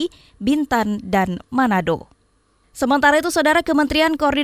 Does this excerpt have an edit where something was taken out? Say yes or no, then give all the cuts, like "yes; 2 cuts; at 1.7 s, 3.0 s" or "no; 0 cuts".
no; 0 cuts